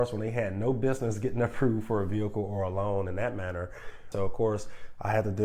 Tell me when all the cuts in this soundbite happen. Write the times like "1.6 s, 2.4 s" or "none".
4.1 s

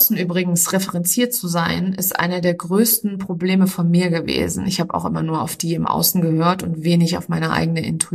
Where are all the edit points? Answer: none

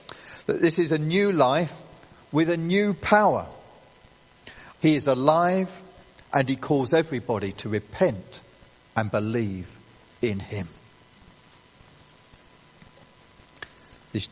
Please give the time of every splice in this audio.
4.7 s

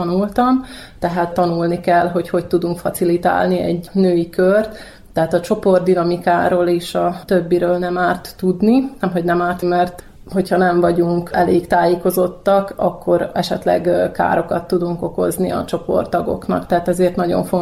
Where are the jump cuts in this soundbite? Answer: 9.6 s

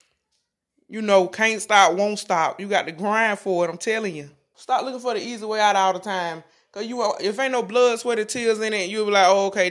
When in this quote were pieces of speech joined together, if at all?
4.5 s

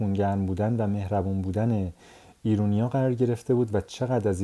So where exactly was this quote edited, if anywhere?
none

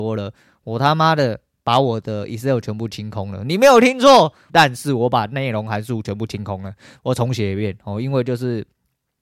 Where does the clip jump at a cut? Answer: 4.5 s

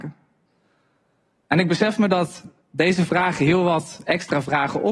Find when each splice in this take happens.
none

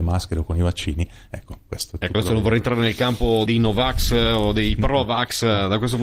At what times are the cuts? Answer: 3.5 s

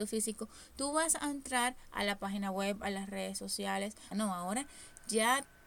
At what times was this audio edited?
4.1 s

